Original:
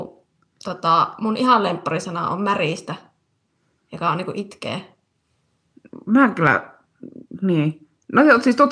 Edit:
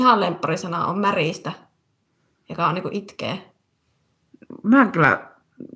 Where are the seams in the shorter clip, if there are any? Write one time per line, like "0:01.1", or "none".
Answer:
none